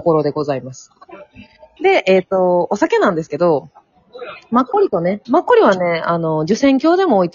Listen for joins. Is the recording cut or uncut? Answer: cut